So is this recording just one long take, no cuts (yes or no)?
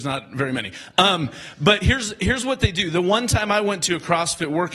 yes